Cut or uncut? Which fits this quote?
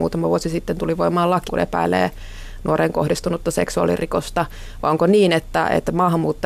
cut